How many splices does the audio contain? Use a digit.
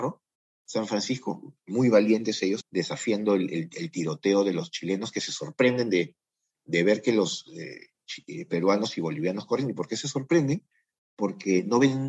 1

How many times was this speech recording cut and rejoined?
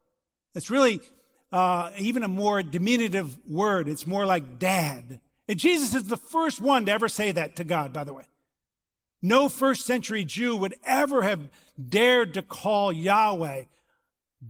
0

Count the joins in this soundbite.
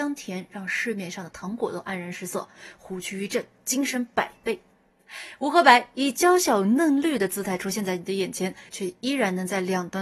1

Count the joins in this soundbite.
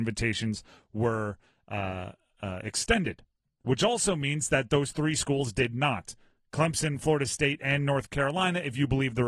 0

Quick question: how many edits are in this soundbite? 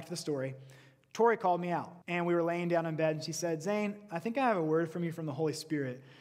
1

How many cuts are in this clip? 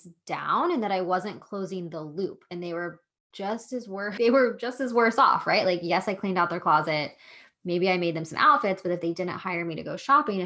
1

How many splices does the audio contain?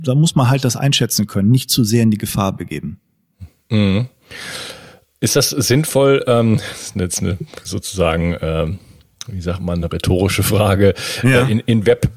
0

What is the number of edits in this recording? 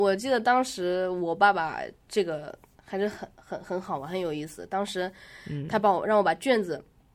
0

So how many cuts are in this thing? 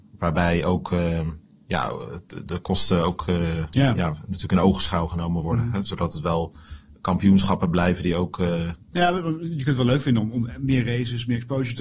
1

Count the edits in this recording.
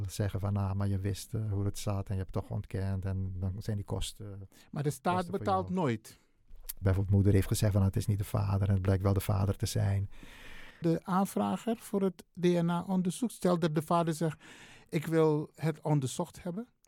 2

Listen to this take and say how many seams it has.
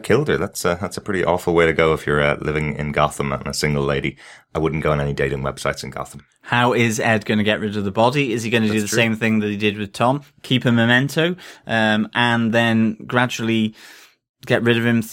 0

